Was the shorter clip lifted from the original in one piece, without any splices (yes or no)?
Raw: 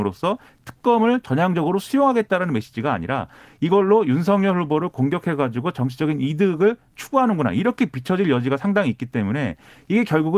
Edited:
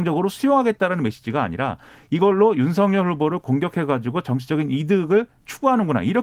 yes